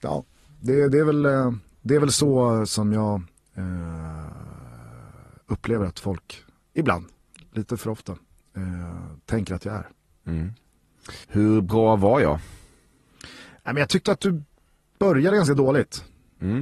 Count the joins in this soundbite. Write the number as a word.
one